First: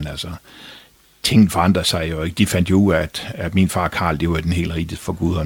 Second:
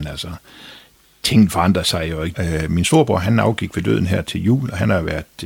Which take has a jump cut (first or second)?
second